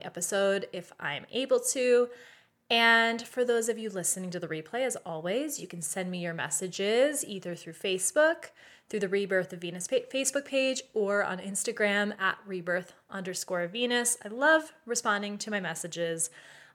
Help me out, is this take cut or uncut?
uncut